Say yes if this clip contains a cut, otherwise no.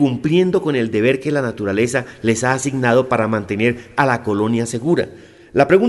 no